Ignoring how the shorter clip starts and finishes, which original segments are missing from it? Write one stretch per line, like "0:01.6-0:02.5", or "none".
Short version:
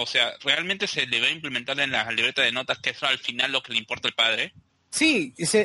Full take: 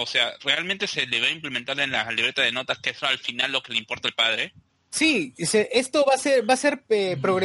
none